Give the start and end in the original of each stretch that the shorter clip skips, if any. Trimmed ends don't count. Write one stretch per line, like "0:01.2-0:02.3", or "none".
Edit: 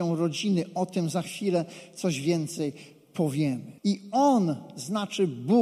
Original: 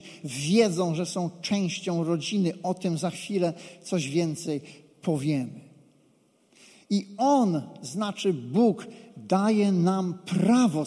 0:05.7-0:06.8